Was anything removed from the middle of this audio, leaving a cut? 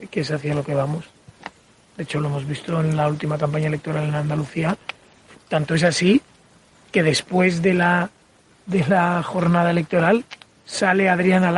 yes; 1 cut; at 5.4 s

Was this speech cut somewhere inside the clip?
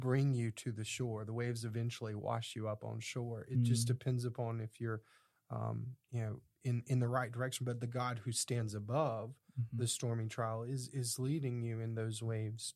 no; 0 cuts

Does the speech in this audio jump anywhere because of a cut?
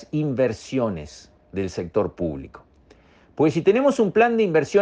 no; 0 cuts

